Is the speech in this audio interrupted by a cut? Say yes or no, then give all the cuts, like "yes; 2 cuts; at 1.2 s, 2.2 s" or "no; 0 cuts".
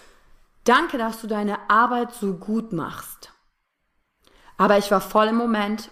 no; 0 cuts